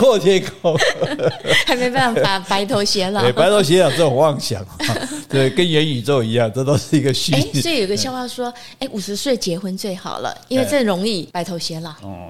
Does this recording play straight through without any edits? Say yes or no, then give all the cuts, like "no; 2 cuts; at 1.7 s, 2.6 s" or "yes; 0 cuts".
yes; 0 cuts